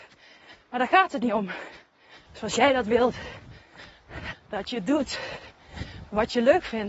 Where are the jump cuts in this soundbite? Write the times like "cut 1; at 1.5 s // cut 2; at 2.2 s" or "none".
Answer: cut 1; at 2.3 s // cut 2; at 4.3 s